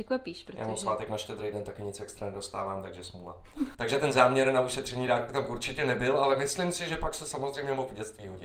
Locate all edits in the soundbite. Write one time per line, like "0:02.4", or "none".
0:03.7

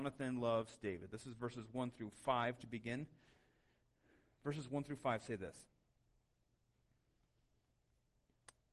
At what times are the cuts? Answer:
none

